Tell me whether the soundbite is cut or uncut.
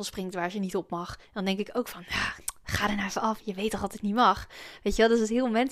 uncut